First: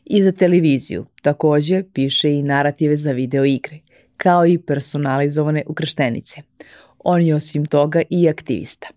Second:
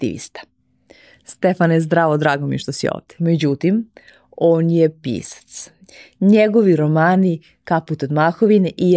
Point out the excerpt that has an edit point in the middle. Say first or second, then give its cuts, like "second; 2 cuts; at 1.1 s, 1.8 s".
second; 1 cut; at 3.2 s